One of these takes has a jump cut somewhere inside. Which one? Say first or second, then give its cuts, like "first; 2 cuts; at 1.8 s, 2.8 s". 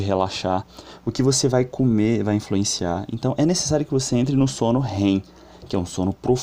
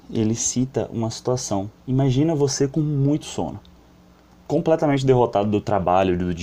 second; 1 cut; at 1.8 s